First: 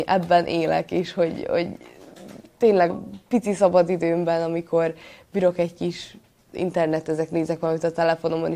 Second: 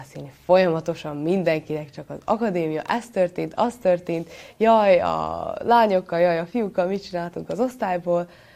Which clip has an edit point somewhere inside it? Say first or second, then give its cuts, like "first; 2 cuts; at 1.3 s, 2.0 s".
first; 2 cuts; at 2.9 s, 6.5 s